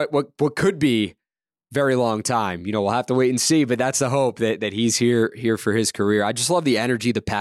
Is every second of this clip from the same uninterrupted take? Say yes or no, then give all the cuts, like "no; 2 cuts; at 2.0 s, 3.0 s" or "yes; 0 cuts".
yes; 0 cuts